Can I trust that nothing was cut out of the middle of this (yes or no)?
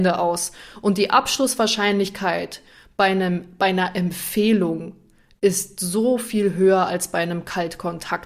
yes